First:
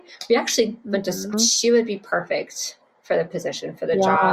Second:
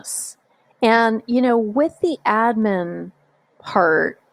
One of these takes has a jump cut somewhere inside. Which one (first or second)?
first